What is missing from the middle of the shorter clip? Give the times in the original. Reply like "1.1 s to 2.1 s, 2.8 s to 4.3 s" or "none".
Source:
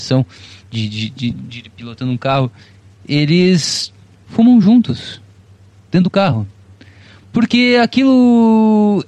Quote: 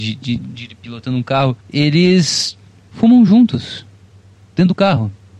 2.5 s to 3.0 s